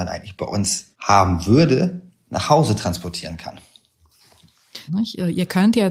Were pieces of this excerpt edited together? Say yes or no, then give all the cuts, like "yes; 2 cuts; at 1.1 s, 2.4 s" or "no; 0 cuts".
yes; 2 cuts; at 0.9 s, 4.9 s